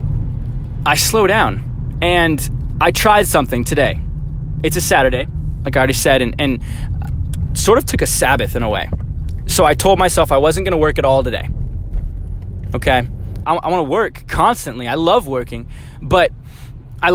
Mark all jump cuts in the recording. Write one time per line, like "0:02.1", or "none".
0:07.5
0:13.4

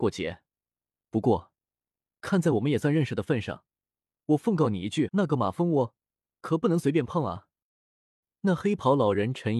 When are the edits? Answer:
0:05.1

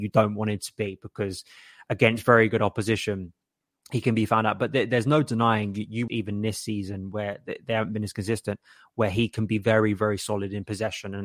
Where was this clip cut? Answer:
0:06.1

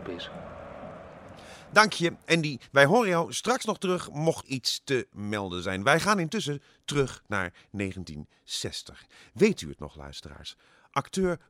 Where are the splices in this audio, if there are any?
0:04.4

